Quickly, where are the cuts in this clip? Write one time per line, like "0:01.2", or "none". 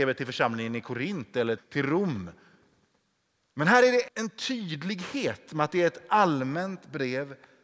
0:01.6
0:04.1